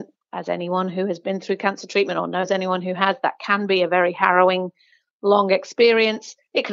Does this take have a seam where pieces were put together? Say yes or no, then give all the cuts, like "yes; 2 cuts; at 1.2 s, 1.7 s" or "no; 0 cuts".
no; 0 cuts